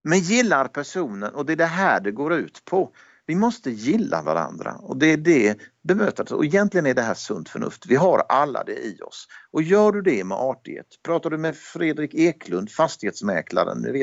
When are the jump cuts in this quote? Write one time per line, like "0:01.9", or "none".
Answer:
none